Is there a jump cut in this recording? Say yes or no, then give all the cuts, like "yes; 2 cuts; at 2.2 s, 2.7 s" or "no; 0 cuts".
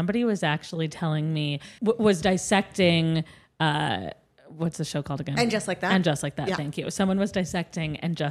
yes; 1 cut; at 1.8 s